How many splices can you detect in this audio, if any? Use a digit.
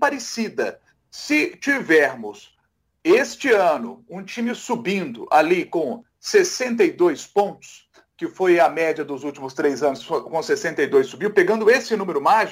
0